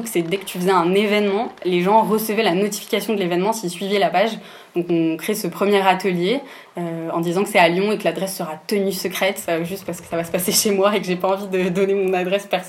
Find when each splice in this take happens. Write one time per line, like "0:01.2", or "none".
none